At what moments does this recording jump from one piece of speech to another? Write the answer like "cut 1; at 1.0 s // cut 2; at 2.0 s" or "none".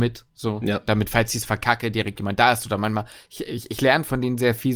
none